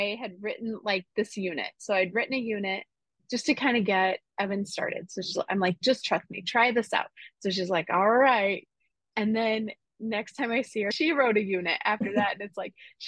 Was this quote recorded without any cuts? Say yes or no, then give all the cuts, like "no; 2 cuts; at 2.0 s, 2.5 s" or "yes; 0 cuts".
yes; 0 cuts